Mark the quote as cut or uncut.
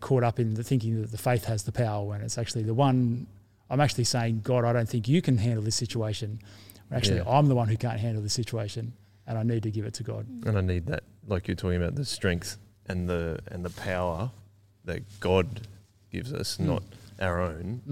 uncut